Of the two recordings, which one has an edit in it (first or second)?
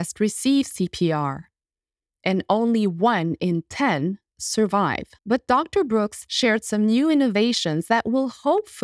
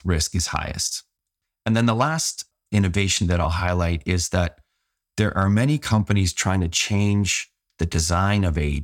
first